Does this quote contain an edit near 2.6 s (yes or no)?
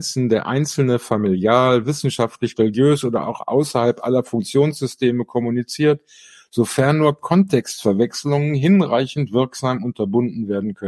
yes